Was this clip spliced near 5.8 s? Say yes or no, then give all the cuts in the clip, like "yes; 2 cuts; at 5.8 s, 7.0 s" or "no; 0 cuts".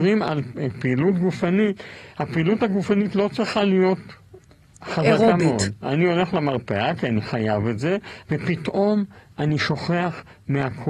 yes; 2 cuts; at 5.8 s, 8.2 s